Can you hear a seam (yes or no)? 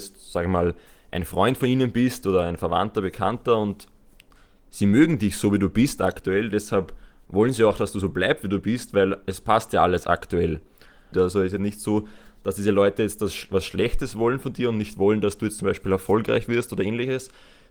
yes